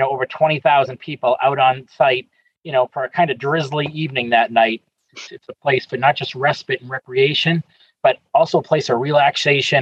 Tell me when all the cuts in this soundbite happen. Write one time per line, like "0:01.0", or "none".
0:05.3